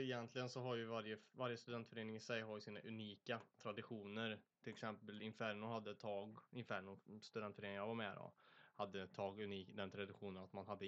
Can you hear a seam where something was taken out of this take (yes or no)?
no